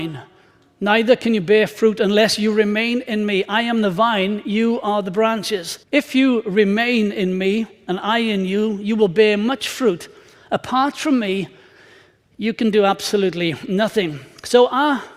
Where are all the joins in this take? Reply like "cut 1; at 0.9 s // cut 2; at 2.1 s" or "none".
cut 1; at 5.8 s